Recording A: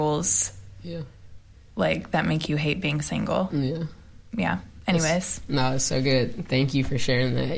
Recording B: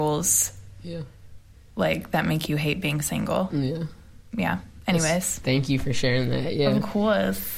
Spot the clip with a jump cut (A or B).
B